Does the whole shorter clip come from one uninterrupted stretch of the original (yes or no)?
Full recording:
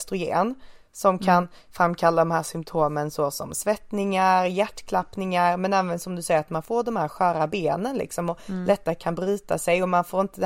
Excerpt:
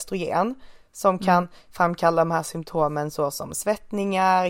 yes